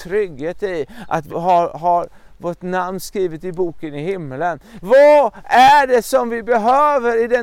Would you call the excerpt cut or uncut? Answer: cut